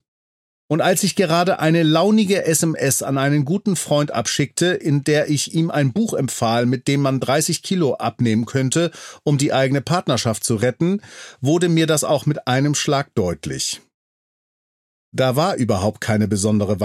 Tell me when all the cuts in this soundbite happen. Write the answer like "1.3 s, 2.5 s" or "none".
none